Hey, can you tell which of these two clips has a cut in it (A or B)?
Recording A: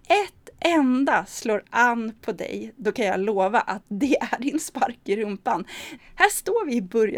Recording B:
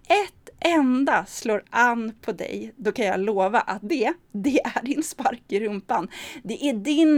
A